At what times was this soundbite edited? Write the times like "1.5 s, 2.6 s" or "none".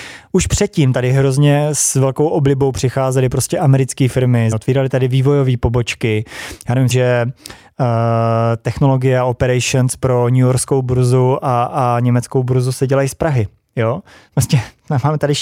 4.5 s, 6.9 s